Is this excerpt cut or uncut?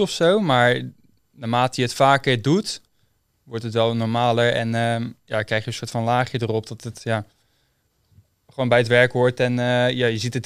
uncut